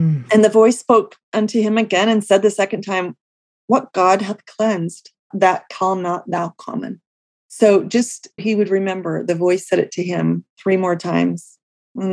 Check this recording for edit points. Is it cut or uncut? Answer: cut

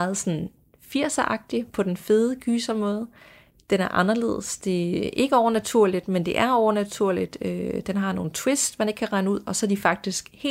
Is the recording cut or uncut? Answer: uncut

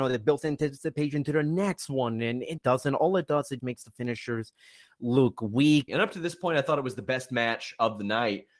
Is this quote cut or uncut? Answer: cut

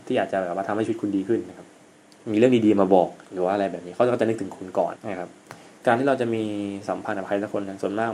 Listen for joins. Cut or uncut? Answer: cut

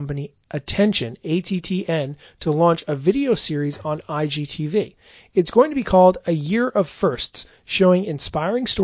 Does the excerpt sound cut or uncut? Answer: uncut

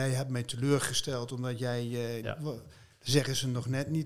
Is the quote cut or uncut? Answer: cut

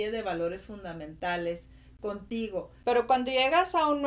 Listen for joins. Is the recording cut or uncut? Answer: cut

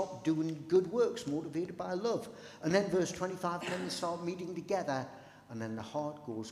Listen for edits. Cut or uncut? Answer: uncut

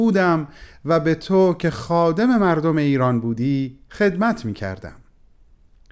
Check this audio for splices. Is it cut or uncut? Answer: uncut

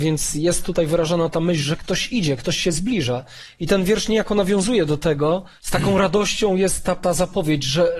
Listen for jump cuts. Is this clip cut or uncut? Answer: cut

